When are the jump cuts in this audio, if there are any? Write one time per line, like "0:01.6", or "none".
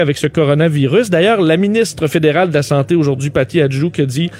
none